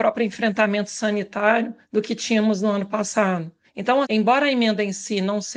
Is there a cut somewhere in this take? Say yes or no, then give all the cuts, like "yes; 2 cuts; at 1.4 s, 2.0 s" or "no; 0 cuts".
yes; 1 cut; at 4.0 s